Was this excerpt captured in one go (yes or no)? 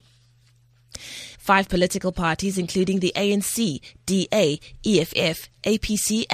no